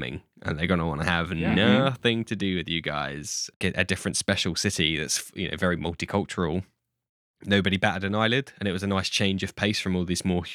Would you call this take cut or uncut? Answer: cut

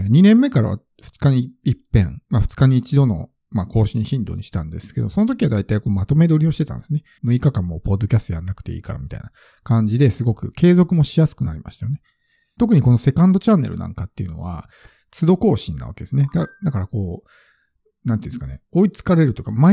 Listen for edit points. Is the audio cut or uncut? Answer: cut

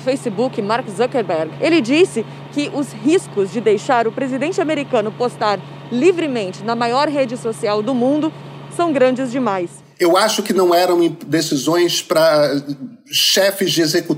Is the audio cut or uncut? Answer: uncut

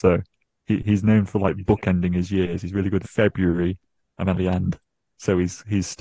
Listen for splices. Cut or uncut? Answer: cut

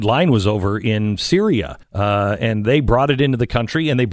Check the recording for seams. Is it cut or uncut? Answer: cut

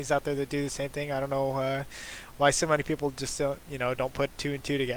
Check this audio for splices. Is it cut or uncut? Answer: uncut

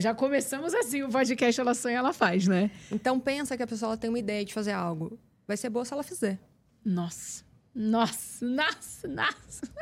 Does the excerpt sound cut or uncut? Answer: uncut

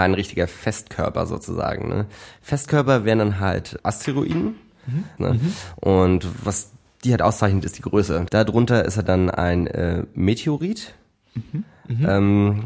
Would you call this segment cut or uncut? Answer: cut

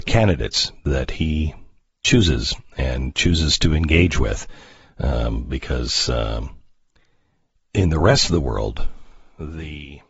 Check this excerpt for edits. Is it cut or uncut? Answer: uncut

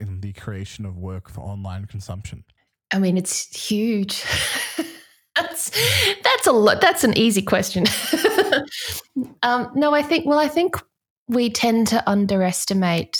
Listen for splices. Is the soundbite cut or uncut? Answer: uncut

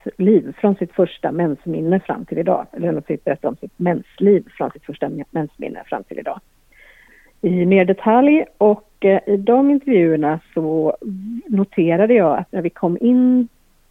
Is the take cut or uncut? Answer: cut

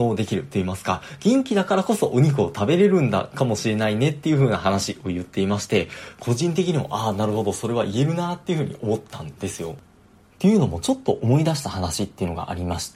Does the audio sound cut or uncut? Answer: uncut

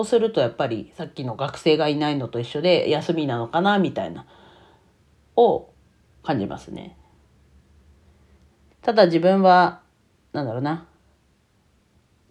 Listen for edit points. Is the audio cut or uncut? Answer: cut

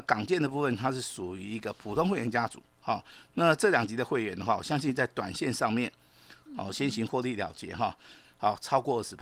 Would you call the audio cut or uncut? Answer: cut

